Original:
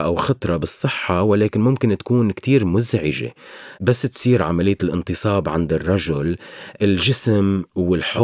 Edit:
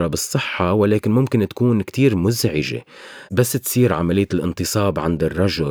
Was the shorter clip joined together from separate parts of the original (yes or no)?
no